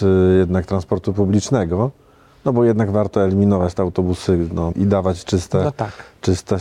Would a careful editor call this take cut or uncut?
cut